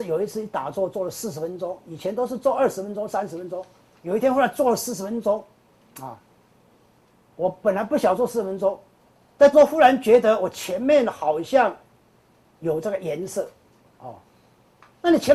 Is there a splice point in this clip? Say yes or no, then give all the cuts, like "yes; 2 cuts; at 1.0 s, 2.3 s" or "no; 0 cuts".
yes; 1 cut; at 9.5 s